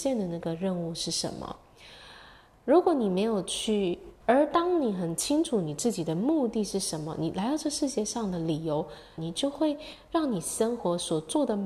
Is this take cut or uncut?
cut